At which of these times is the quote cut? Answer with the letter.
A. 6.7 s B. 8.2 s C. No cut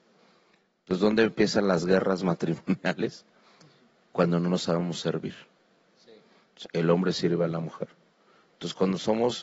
A